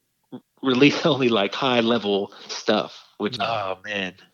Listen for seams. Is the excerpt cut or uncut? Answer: cut